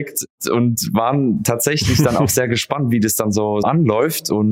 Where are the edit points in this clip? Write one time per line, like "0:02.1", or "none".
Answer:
0:03.6